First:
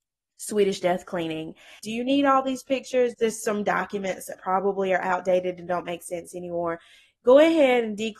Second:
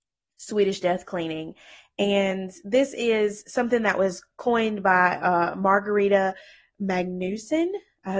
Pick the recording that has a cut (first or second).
first